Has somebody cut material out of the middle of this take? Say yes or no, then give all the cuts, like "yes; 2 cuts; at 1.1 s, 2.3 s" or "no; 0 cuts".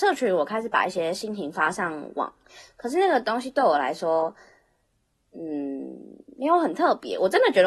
no; 0 cuts